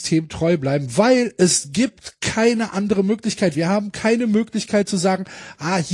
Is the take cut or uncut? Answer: cut